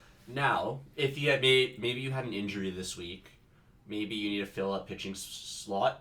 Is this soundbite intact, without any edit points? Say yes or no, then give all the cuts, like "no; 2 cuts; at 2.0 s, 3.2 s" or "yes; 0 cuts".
yes; 0 cuts